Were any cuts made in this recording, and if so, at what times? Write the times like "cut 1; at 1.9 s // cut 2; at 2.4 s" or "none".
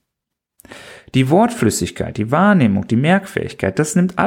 none